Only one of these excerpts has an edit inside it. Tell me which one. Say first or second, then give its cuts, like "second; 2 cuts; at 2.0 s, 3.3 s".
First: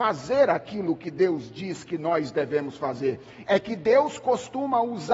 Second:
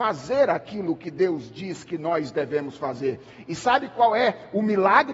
first; 1 cut; at 3.4 s